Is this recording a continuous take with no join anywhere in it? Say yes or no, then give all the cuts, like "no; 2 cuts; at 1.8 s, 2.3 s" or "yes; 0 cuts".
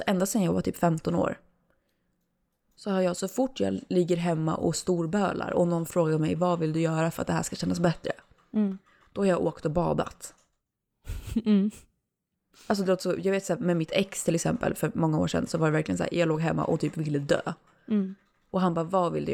yes; 0 cuts